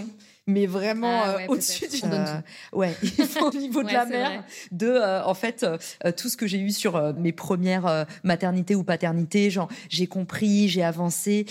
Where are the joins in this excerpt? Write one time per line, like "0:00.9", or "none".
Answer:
0:02.0
0:03.5
0:07.2